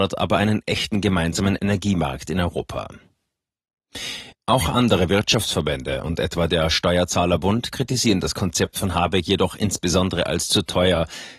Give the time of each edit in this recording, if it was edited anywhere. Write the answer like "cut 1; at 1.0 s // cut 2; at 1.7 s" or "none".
cut 1; at 4.3 s